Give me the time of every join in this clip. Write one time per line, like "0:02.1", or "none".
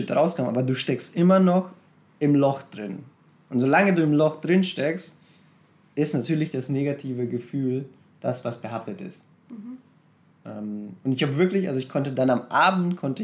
none